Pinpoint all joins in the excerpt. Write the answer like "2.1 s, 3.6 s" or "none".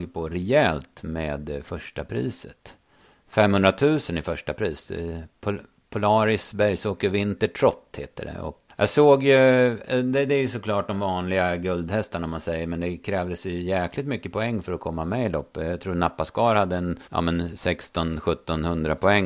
8.7 s, 17.0 s